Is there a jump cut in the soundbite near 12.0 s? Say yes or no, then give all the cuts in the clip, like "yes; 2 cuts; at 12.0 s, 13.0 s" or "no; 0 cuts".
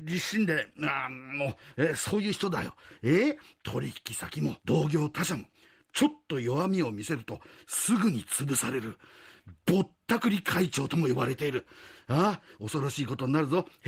no; 1 cut; at 4.6 s